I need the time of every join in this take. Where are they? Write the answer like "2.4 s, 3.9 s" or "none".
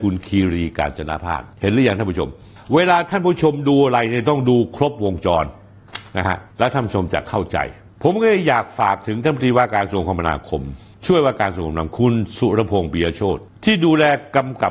1.5 s